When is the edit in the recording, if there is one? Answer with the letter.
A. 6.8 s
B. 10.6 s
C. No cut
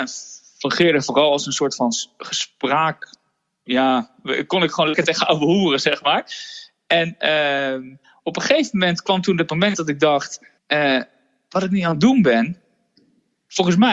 B